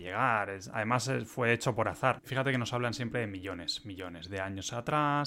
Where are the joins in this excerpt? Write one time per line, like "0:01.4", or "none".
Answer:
0:02.2

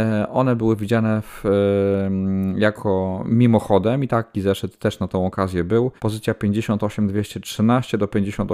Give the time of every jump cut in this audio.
0:06.0

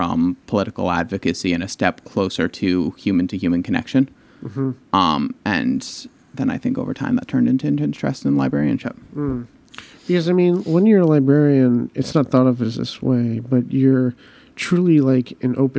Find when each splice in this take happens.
none

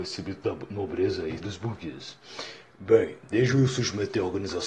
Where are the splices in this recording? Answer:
0:01.4
0:02.7

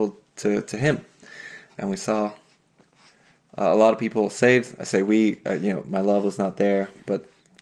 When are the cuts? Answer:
0:01.7

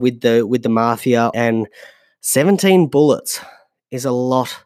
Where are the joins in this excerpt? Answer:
0:01.3

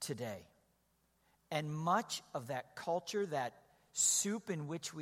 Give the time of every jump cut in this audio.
none

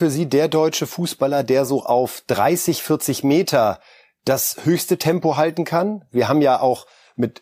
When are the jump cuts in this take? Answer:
none

